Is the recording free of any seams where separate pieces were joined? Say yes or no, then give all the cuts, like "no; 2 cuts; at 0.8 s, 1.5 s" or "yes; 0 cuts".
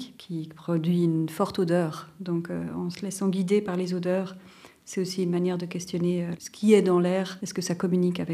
yes; 0 cuts